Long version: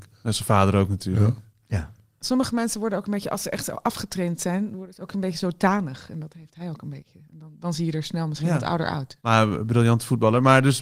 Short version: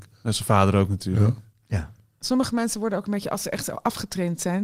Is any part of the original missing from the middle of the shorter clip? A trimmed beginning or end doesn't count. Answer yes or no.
no